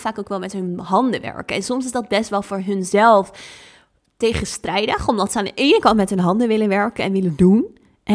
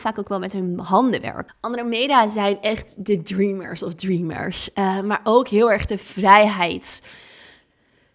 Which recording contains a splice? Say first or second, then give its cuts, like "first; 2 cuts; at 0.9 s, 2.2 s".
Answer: second; 1 cut; at 1.5 s